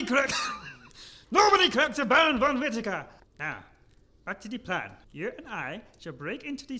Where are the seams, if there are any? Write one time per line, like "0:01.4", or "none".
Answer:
0:03.2
0:05.0